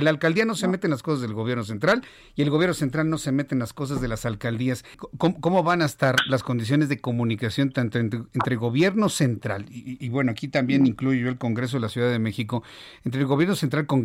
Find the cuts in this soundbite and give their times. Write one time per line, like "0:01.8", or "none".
0:04.9